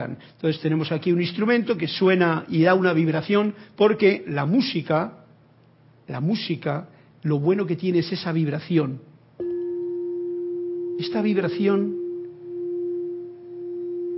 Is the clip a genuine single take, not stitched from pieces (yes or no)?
yes